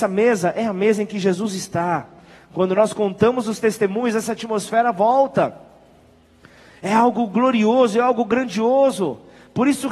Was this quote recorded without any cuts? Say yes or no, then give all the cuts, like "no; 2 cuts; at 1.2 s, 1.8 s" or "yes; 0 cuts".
yes; 0 cuts